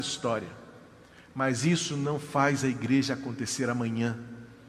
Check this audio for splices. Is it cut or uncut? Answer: uncut